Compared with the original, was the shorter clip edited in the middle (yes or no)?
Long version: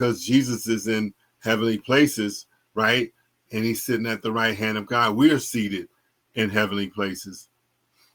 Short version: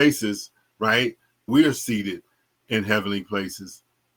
yes